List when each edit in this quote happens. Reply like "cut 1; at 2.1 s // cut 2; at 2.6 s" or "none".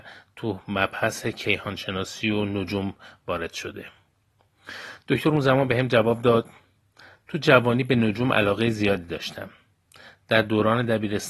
none